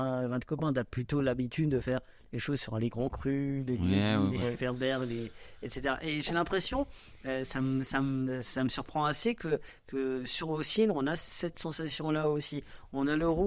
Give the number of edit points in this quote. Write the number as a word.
zero